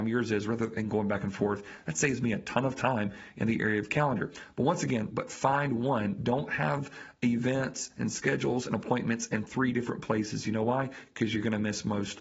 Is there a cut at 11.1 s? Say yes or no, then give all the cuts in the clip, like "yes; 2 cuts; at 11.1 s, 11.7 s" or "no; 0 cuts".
no; 1 cut; at 5.1 s